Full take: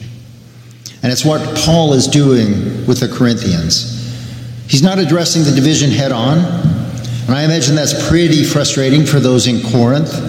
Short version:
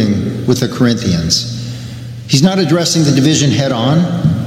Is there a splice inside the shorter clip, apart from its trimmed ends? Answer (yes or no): no